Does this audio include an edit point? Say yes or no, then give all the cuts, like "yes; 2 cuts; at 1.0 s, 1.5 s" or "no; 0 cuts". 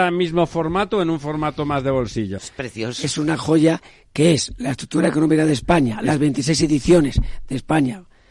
yes; 1 cut; at 2.4 s